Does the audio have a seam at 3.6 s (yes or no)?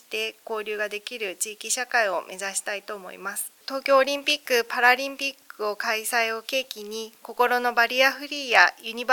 yes